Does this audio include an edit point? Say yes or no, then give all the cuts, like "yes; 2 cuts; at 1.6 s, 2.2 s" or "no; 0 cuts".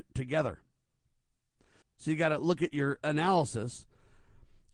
yes; 2 cuts; at 1.8 s, 3.0 s